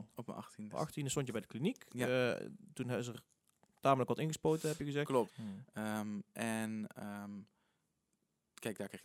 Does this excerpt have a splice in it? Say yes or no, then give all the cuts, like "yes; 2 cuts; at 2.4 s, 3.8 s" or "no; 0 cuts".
yes; 1 cut; at 5.3 s